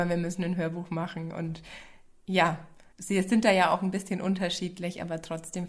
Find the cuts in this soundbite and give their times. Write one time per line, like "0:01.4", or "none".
0:02.9